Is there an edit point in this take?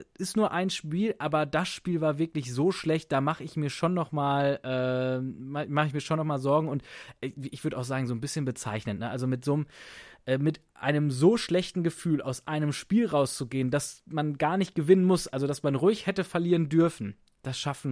no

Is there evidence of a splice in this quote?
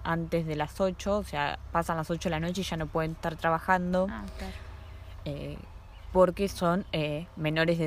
no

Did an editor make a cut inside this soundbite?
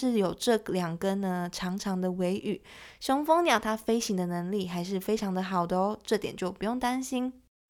no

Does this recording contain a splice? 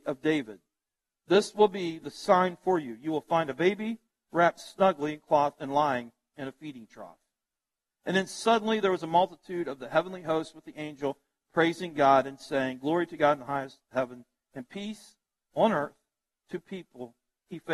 no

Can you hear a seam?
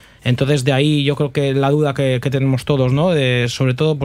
no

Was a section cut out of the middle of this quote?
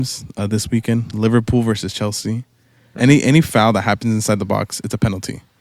yes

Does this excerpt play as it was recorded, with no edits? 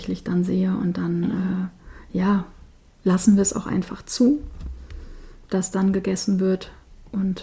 no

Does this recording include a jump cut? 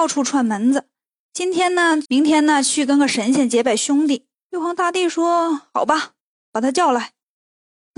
yes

